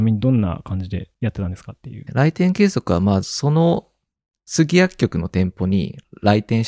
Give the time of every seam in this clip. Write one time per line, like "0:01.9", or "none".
0:02.1
0:03.2